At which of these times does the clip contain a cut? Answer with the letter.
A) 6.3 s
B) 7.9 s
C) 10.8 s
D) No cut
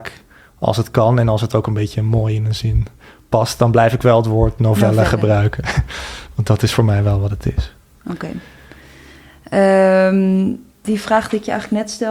C